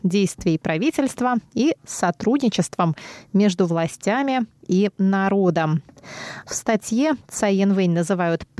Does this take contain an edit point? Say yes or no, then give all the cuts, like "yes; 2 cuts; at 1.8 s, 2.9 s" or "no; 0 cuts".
yes; 1 cut; at 6.4 s